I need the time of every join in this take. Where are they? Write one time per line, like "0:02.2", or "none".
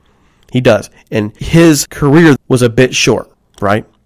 0:02.4